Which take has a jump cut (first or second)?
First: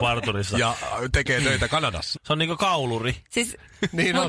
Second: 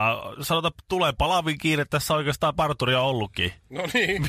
first